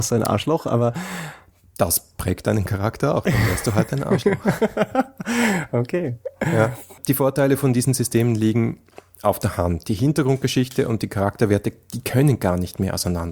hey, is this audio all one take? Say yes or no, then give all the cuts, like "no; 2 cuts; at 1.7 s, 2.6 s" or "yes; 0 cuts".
yes; 0 cuts